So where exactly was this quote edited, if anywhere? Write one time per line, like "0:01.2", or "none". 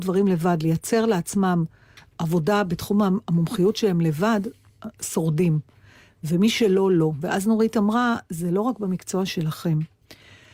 none